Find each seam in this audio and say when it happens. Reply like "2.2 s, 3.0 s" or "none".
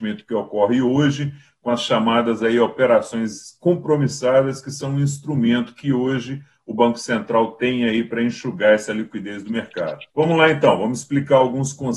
10.1 s